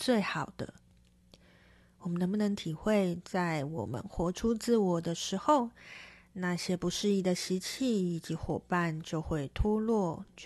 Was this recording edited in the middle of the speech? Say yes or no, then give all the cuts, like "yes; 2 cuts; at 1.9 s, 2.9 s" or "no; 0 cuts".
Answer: no; 0 cuts